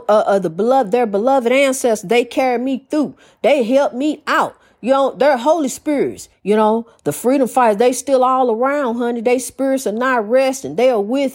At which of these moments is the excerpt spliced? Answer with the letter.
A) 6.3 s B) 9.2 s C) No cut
A